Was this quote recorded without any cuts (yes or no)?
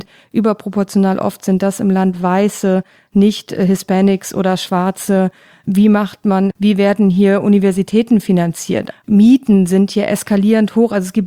no